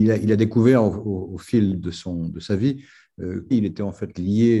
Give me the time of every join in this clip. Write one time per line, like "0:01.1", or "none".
0:03.5